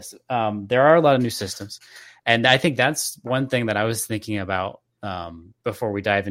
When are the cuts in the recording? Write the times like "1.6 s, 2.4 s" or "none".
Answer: none